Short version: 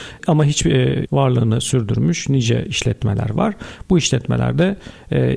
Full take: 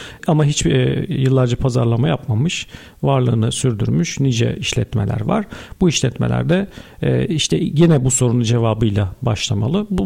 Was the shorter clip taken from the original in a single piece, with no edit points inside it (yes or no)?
no